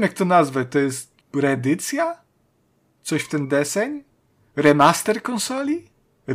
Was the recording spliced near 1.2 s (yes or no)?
yes